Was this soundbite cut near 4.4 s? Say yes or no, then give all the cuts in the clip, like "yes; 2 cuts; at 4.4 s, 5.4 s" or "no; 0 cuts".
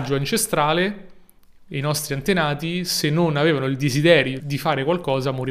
yes; 1 cut; at 4.4 s